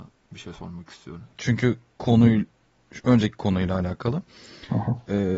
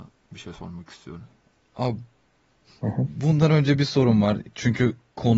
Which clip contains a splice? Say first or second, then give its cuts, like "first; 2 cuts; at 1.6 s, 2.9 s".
first; 1 cut; at 1.3 s